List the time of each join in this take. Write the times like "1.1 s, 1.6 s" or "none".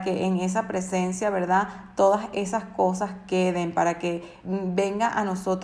4.4 s